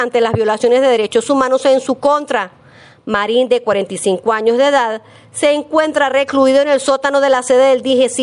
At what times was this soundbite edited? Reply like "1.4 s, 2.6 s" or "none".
none